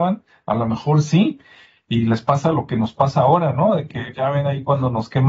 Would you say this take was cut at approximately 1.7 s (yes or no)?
no